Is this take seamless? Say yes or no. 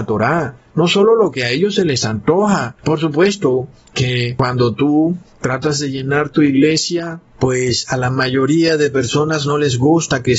yes